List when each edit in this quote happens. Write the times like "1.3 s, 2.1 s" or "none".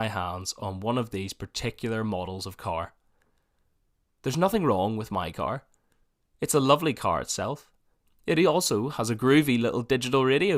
8.0 s